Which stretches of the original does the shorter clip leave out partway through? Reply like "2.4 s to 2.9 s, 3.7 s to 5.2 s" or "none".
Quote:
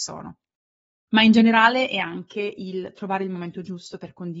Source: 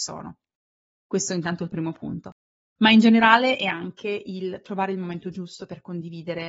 0.9 s to 2.6 s